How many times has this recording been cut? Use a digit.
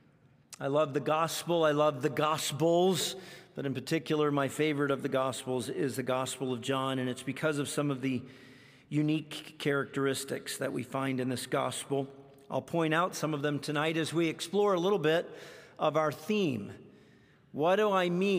0